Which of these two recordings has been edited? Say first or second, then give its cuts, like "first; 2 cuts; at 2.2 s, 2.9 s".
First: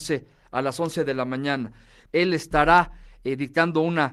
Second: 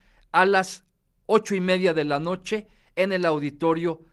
first; 1 cut; at 2.1 s